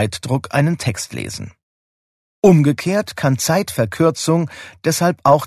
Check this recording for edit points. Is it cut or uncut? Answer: cut